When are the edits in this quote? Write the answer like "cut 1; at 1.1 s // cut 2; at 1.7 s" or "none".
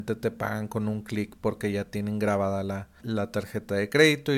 cut 1; at 3.0 s